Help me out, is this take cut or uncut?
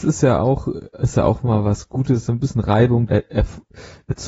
cut